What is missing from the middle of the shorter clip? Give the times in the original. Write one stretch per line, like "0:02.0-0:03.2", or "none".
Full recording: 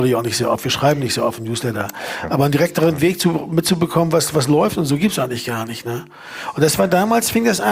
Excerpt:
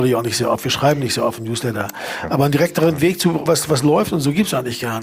0:03.5-0:04.1